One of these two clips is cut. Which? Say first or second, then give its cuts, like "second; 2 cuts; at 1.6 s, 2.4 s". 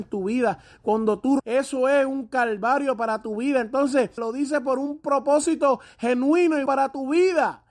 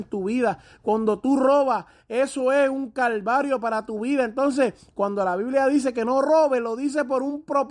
first; 3 cuts; at 1.4 s, 4.2 s, 6.7 s